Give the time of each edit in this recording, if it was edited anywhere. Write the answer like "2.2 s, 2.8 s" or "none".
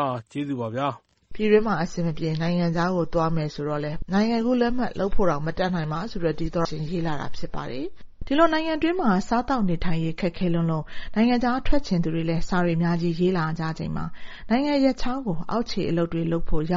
6.7 s